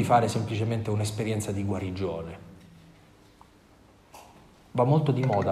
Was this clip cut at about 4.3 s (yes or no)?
no